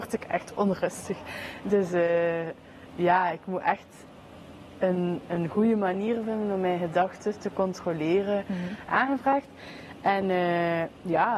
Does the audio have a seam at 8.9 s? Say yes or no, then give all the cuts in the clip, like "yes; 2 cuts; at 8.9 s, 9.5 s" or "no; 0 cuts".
yes; 1 cut; at 8.9 s